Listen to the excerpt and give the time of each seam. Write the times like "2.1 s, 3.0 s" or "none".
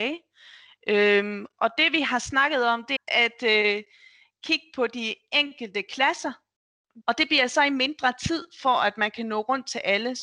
3.0 s, 7.0 s